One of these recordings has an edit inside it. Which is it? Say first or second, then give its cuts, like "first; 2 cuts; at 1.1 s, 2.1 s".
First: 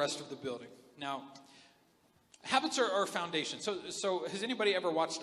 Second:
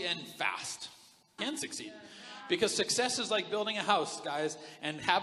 second; 1 cut; at 1.4 s